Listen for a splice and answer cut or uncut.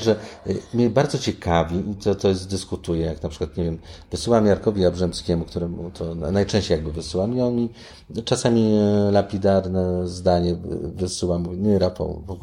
uncut